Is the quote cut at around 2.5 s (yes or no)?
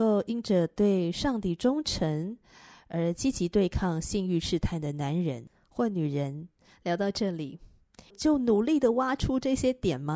no